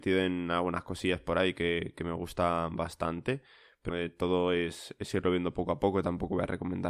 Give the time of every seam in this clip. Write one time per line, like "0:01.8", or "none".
0:03.9